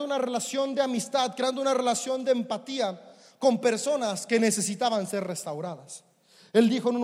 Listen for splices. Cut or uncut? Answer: uncut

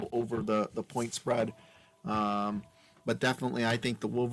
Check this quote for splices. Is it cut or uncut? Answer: uncut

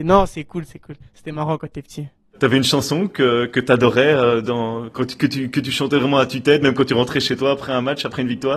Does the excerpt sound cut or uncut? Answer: uncut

